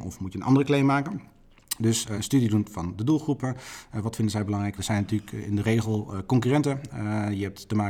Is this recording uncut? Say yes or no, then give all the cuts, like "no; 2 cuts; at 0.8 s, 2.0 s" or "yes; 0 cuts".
no; 2 cuts; at 2.1 s, 4.8 s